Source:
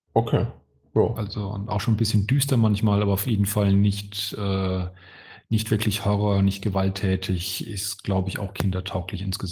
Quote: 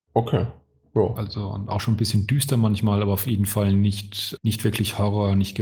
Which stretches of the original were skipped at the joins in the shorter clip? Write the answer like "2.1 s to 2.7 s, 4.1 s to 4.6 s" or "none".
4.4 s to 5.4 s